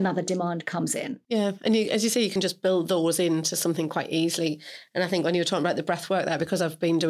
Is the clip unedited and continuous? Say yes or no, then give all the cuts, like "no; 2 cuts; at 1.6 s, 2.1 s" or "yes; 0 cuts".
yes; 0 cuts